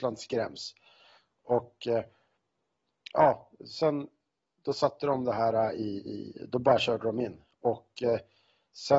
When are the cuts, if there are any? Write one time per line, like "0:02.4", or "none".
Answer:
none